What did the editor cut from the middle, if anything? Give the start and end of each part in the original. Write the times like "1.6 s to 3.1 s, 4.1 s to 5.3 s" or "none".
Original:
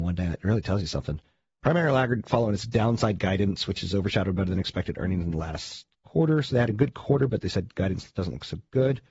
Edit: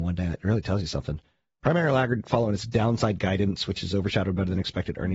none